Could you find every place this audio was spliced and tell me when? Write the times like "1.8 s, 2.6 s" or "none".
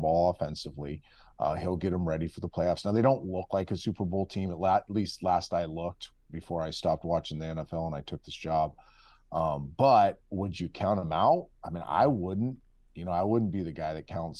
none